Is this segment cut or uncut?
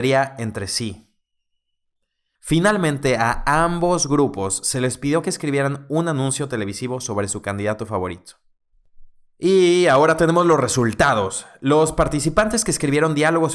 cut